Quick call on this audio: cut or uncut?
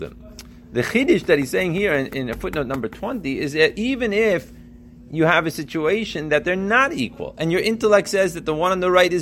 uncut